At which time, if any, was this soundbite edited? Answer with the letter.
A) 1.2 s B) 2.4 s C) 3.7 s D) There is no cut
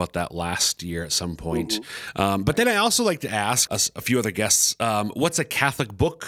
C